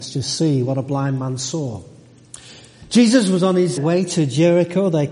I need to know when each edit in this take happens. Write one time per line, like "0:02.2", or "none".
0:03.8